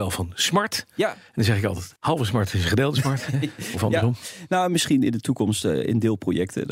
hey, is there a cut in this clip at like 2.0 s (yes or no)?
yes